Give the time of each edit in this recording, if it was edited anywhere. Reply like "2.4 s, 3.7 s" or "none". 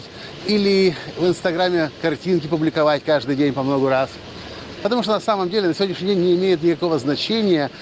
4.8 s